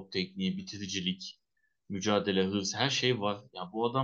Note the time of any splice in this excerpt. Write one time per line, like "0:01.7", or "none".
none